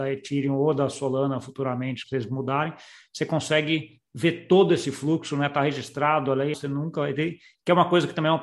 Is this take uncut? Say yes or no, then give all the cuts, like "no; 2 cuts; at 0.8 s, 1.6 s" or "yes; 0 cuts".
no; 2 cuts; at 2.0 s, 6.5 s